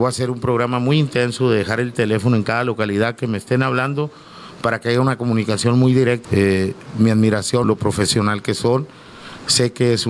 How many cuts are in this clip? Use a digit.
2